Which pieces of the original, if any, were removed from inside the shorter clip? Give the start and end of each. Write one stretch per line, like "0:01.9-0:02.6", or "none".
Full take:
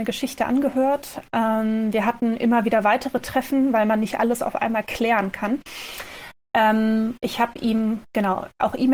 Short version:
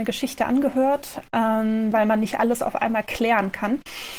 0:01.9-0:03.7